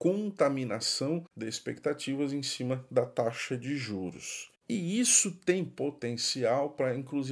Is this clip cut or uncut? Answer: uncut